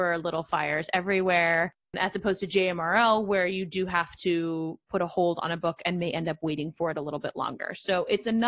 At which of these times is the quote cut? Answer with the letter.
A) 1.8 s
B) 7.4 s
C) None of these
A